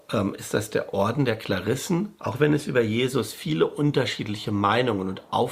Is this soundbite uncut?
no; 1 cut; at 2.2 s

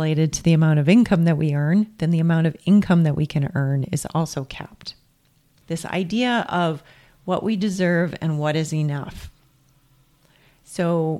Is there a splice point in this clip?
yes; 1 cut; at 5.6 s

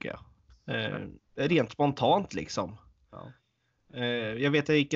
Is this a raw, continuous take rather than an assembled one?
no; 1 cut; at 1.2 s

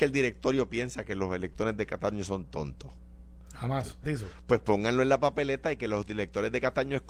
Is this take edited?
yes; 1 cut; at 4.0 s

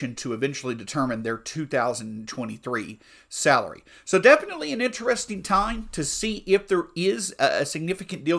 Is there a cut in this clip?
no; 0 cuts

